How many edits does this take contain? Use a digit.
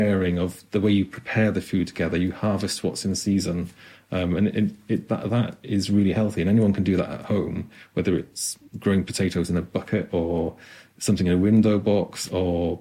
0